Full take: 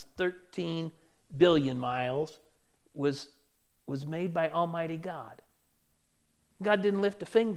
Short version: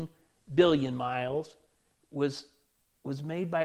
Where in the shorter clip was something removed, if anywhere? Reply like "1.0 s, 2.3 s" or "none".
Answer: none